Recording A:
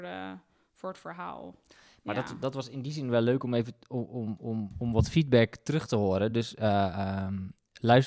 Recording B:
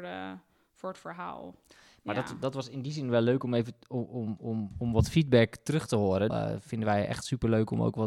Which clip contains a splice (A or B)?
B